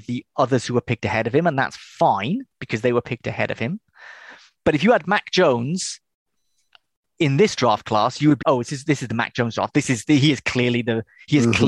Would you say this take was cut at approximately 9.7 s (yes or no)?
no